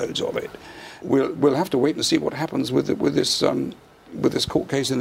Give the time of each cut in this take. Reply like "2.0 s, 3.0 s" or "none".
1.0 s